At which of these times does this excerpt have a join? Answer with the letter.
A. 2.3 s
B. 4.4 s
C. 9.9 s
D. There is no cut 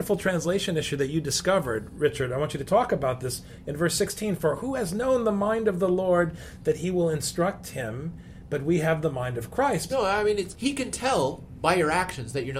C